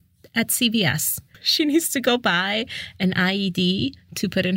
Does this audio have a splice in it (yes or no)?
no